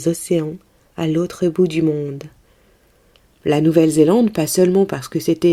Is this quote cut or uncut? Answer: cut